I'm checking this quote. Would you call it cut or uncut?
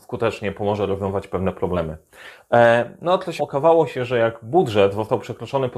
cut